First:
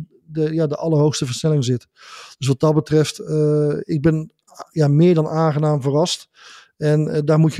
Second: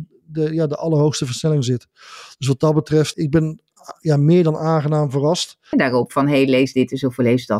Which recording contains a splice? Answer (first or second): second